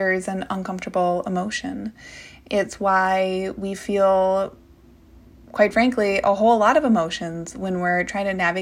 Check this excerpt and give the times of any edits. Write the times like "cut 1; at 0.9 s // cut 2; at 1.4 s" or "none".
none